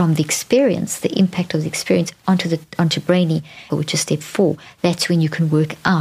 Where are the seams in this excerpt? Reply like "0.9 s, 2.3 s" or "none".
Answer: 3.7 s